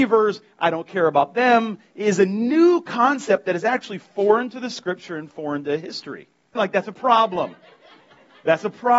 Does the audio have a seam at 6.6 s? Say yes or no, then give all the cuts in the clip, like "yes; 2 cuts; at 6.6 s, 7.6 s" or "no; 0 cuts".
yes; 1 cut; at 6.6 s